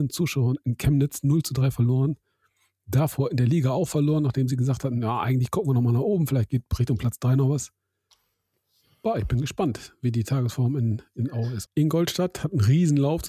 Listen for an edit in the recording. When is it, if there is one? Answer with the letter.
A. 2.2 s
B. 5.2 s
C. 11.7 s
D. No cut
C